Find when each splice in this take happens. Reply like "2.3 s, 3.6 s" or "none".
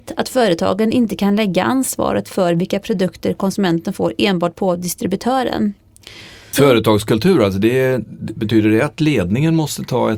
6.5 s